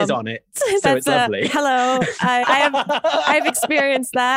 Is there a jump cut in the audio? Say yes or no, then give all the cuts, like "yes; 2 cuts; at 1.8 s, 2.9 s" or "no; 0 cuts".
yes; 1 cut; at 2.4 s